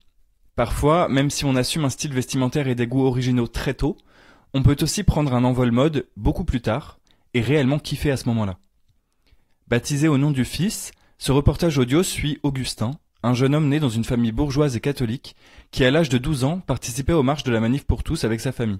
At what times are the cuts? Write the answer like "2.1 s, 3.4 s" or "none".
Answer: 9.5 s